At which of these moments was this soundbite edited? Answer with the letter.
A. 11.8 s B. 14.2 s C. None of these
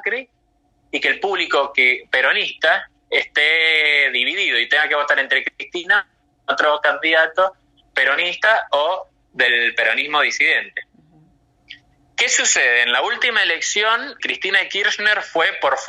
B